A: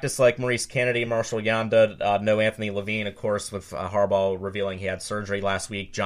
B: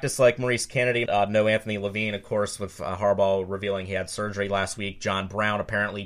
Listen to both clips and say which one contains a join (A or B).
B